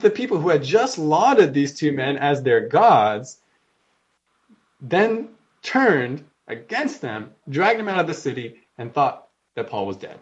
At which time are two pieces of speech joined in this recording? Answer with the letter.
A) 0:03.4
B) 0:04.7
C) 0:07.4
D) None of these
C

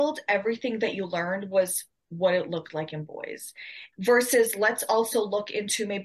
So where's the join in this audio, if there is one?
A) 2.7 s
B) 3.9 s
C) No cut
B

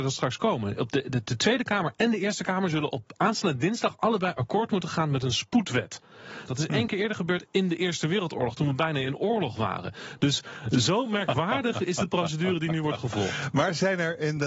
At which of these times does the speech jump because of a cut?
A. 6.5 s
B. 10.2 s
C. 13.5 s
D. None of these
A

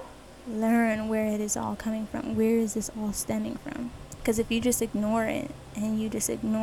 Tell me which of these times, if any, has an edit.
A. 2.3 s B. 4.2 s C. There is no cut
B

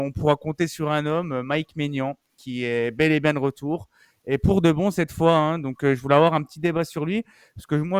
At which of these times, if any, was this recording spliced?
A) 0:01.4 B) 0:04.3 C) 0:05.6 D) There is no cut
D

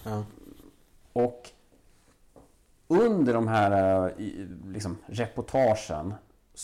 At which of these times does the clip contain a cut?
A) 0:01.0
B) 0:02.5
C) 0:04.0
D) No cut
A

